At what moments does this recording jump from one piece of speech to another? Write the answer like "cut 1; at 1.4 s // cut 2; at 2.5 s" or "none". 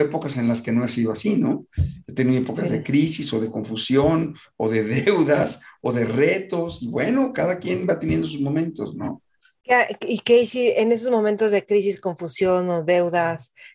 none